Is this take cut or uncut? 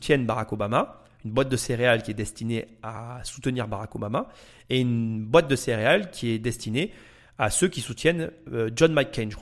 uncut